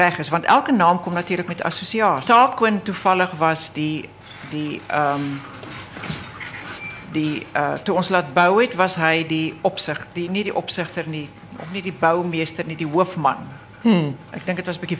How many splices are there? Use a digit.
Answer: 1